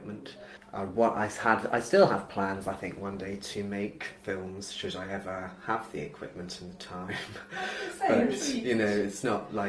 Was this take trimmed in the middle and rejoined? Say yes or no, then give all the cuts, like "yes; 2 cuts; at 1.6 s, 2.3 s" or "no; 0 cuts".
no; 0 cuts